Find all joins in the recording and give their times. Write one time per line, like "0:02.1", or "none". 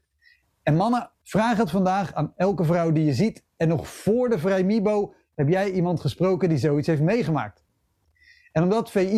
0:01.1

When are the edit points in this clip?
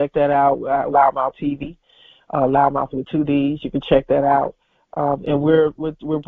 0:00.9

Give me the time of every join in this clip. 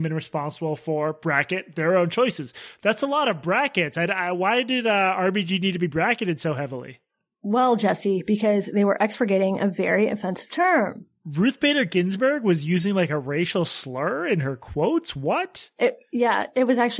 none

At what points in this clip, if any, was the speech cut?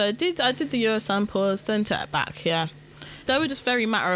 0:03.3

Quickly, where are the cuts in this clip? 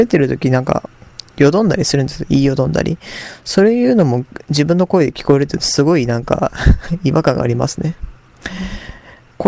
none

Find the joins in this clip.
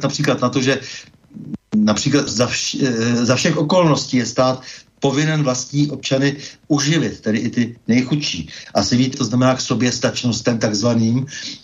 0:02.3
0:09.1

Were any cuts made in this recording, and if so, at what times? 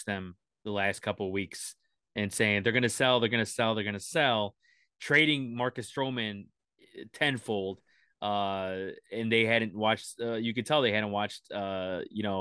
none

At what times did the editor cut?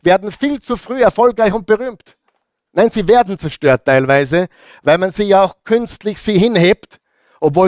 0:02.7

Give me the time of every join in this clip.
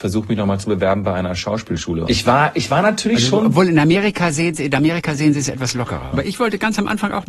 0:02.1
0:06.1

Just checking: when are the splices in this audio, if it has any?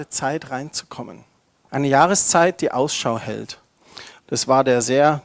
0:01.6
0:04.2

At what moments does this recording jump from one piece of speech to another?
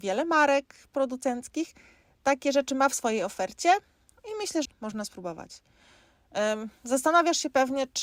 0:04.7

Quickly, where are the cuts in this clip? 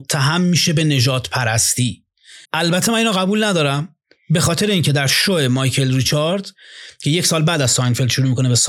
0:02.4

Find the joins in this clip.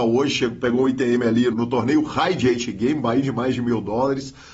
0:01.5

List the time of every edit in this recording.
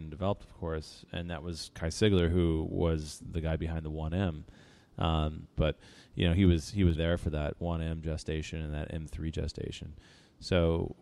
0:05.6
0:06.9

